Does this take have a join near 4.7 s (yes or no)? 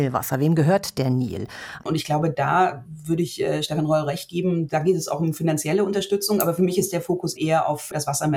no